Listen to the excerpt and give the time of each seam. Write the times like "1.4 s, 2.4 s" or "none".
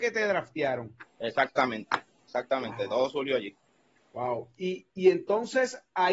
4.0 s